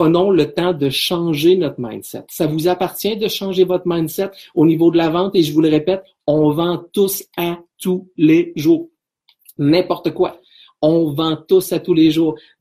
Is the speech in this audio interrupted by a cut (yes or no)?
no